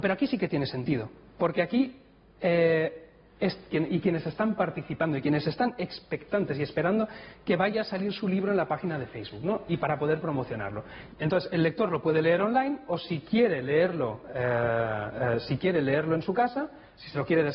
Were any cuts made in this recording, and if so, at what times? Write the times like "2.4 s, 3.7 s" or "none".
3.7 s, 11.1 s

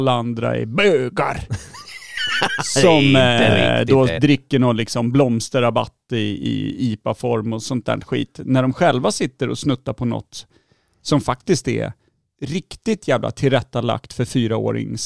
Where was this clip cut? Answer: none

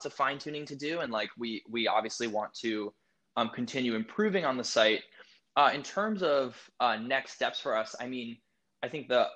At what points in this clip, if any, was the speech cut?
none

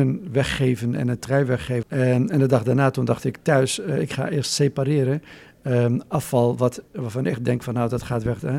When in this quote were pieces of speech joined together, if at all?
1.8 s

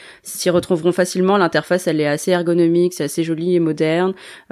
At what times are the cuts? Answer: none

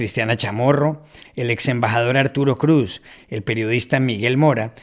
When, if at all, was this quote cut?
1.2 s, 3.2 s

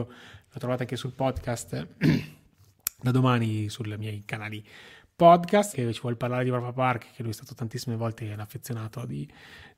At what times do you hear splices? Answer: 5.7 s

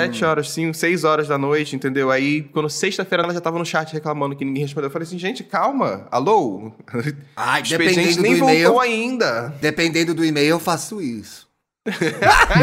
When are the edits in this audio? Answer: 3.2 s

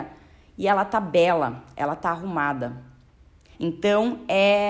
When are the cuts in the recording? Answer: 3.5 s

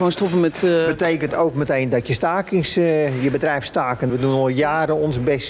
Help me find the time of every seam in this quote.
4.1 s

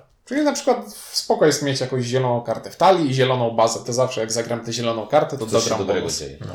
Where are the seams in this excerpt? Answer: 3.8 s, 5.4 s

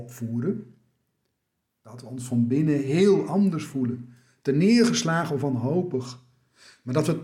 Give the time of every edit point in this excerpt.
none

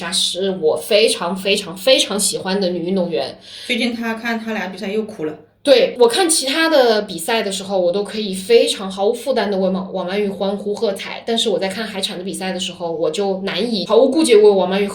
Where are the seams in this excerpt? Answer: none

